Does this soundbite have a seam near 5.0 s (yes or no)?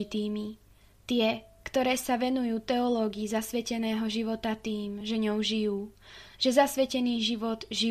no